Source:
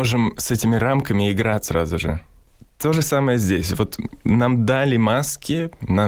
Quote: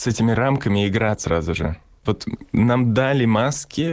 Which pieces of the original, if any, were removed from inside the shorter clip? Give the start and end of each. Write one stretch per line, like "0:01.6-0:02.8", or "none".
0:02.5-0:03.8